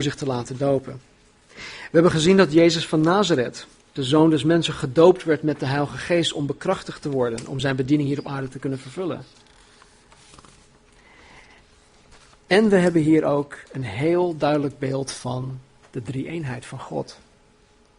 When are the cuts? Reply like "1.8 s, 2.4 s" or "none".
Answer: none